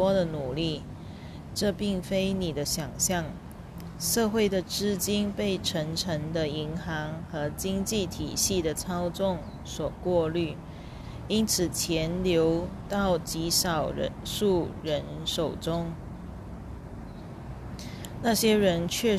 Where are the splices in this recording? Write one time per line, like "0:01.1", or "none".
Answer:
none